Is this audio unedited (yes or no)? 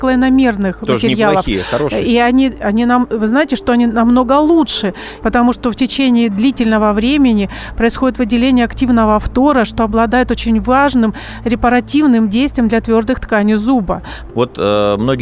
no